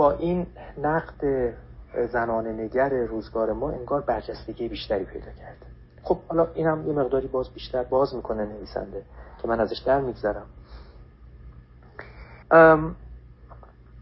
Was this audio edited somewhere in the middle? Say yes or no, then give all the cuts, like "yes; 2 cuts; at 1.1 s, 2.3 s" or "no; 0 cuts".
yes; 1 cut; at 12.4 s